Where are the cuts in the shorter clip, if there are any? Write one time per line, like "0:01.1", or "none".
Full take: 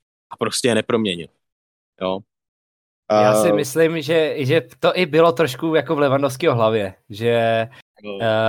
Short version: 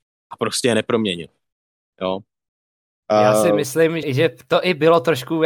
0:04.0